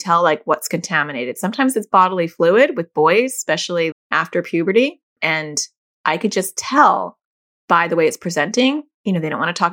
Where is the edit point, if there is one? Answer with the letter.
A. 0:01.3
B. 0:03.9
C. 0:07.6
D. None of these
B